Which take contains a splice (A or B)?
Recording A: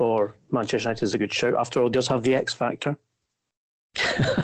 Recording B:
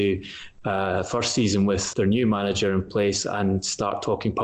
B